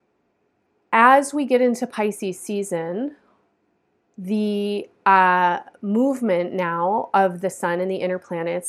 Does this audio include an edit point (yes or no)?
no